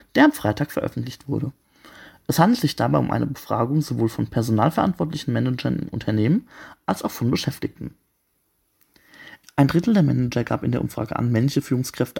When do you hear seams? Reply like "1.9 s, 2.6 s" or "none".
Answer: 9.4 s